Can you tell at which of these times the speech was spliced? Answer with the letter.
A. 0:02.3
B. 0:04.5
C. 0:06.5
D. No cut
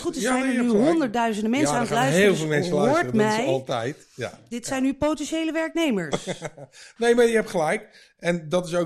D